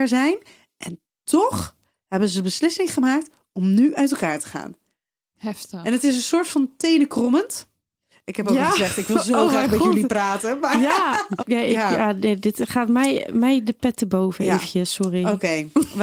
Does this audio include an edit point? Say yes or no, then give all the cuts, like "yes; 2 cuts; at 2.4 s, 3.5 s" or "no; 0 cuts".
yes; 1 cut; at 11.4 s